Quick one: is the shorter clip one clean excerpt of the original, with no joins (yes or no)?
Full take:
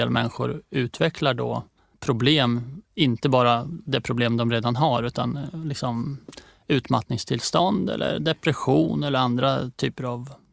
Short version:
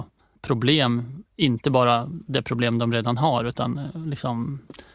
yes